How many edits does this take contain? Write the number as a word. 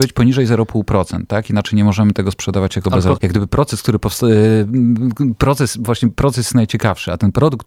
one